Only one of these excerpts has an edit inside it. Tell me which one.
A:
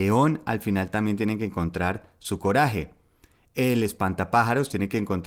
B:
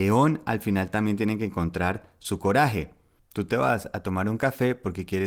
B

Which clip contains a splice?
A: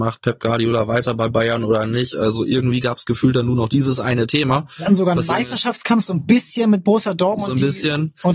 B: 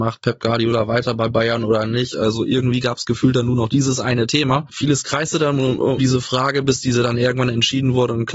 B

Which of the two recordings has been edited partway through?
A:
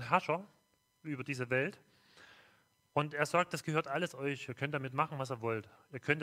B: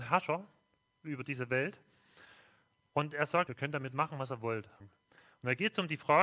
B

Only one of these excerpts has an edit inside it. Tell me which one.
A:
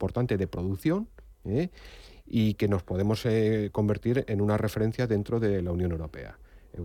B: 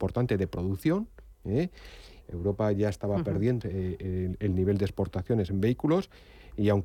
B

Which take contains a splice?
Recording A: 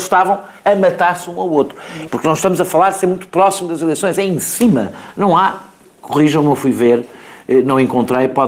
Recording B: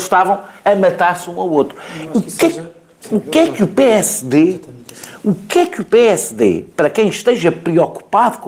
A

